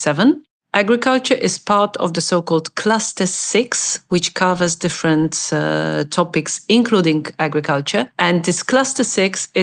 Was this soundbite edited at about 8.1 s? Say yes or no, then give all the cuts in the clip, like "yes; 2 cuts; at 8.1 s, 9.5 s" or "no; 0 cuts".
no; 0 cuts